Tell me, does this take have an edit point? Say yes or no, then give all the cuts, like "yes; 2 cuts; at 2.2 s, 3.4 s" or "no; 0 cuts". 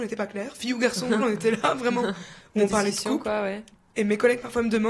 yes; 2 cuts; at 1.2 s, 2.4 s